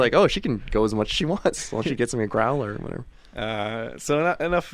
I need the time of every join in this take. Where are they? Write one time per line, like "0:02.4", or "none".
none